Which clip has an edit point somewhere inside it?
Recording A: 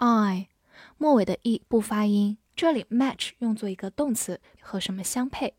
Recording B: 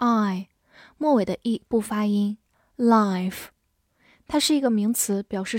A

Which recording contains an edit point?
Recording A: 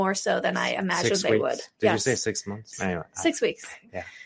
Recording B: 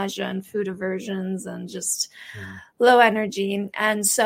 A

